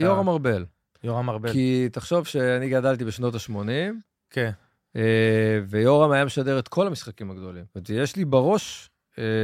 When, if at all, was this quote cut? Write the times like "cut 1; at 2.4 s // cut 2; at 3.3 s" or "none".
cut 1; at 7.7 s